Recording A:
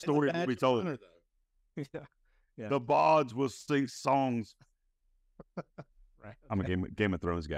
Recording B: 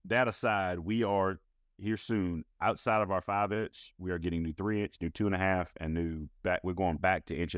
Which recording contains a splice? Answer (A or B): A